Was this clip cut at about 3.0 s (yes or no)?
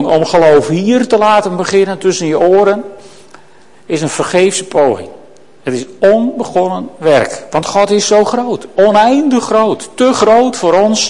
no